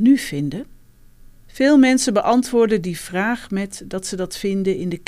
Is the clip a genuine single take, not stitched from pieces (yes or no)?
no